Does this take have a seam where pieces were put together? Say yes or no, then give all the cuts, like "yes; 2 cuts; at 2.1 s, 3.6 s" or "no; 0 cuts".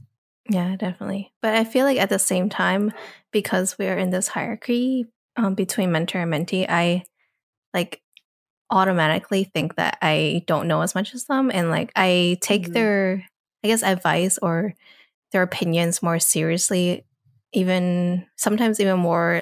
no; 0 cuts